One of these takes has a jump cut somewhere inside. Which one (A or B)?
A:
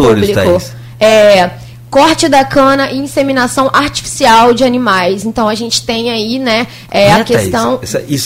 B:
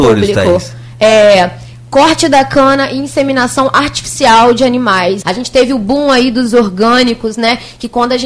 B